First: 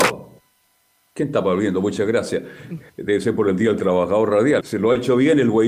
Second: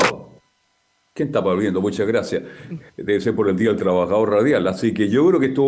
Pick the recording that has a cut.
first; 1 cut; at 4.6 s

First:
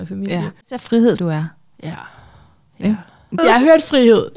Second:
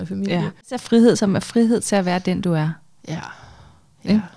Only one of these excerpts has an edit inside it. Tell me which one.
first; 2 cuts; at 1.2 s, 3.4 s

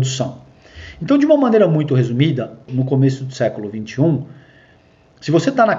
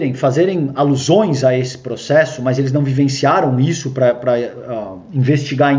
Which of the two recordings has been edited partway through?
first; 1 cut; at 2.7 s

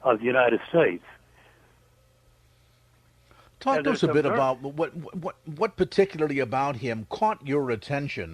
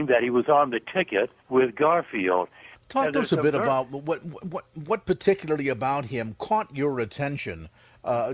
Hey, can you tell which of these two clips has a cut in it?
second; 2 cuts; at 1.4 s, 2.7 s

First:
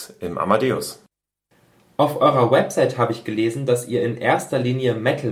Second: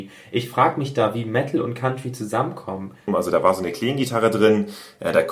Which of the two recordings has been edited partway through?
second; 1 cut; at 3.1 s

